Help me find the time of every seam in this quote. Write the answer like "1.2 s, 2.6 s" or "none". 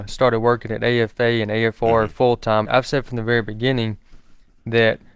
2.6 s

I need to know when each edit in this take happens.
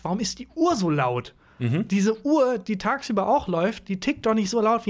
none

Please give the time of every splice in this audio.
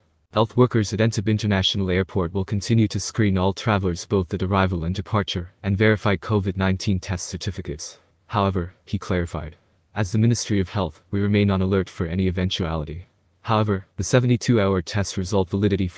8.1 s

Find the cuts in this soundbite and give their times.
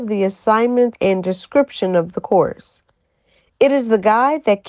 0.9 s

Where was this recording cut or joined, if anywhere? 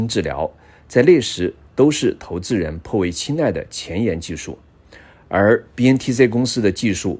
none

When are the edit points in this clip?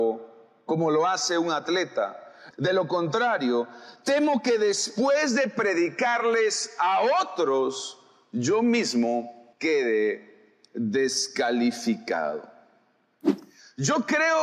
2.5 s, 9.5 s

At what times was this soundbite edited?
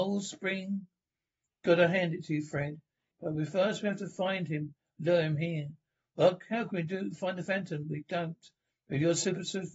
3.1 s, 8.7 s

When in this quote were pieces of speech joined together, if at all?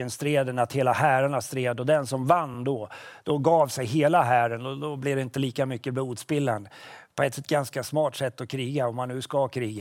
none

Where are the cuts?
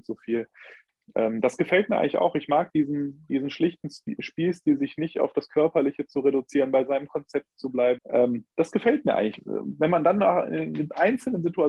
8.0 s

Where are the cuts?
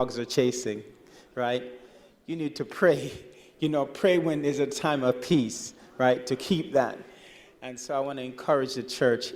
none

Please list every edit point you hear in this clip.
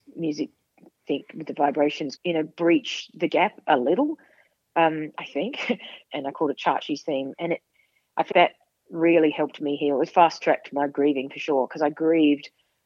2.2 s, 6.0 s, 8.3 s

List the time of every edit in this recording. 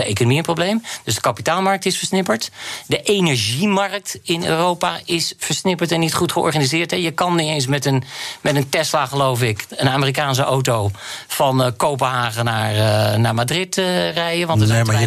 none

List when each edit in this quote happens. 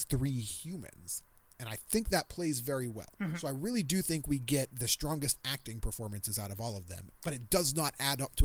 3.1 s, 7.1 s

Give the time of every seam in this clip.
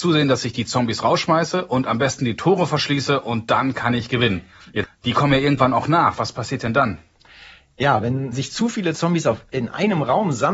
4.8 s, 8.3 s

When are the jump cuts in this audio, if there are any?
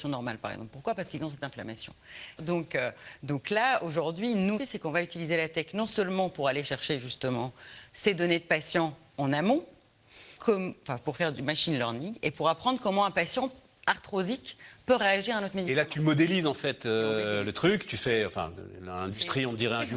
2.4 s, 4.6 s, 10.4 s

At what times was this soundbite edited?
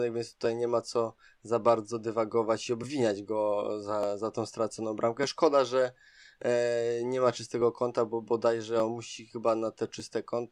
none

